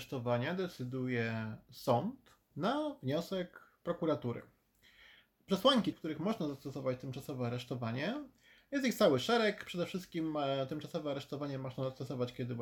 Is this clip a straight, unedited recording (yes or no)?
no